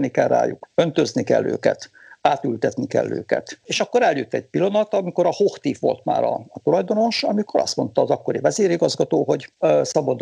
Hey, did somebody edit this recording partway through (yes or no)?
yes